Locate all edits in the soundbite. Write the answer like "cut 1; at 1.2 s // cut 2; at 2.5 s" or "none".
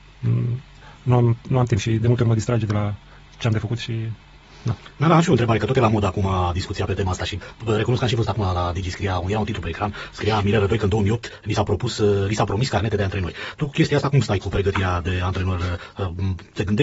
none

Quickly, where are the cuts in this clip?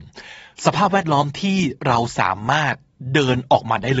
none

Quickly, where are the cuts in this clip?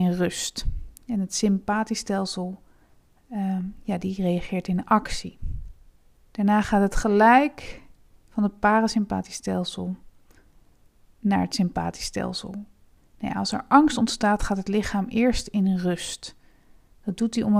cut 1; at 6.2 s // cut 2; at 13.0 s

